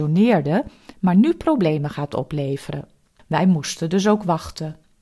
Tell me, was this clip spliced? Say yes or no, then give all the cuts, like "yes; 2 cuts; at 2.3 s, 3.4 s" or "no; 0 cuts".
yes; 1 cut; at 3.2 s